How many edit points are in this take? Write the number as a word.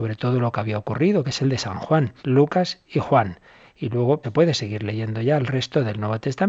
two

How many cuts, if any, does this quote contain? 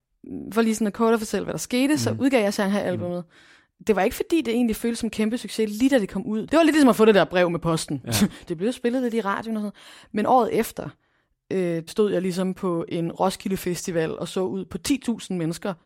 three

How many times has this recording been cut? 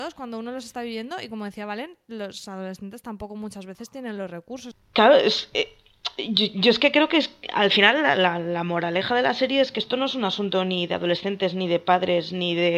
one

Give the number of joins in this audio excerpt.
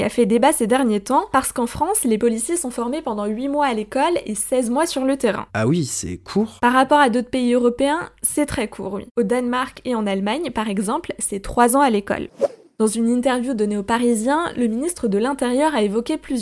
zero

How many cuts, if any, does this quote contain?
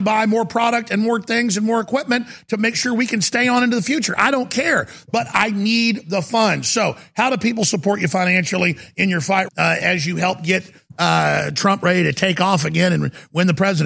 one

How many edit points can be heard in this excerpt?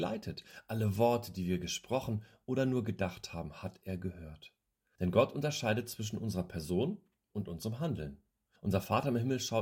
two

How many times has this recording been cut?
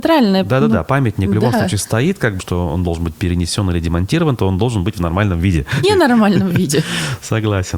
two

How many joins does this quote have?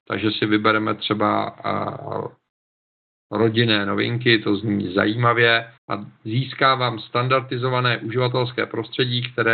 one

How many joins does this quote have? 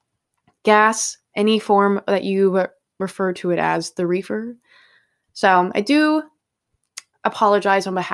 one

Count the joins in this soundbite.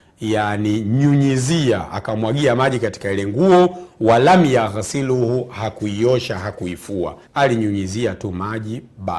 one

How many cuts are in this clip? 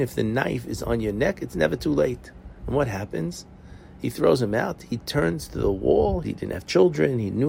one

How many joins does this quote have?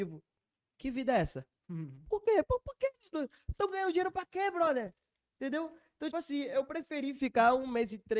one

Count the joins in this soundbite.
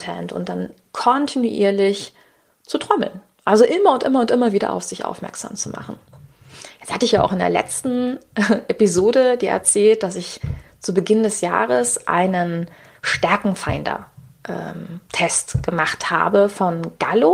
zero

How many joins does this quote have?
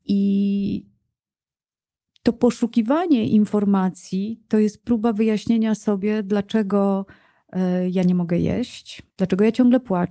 one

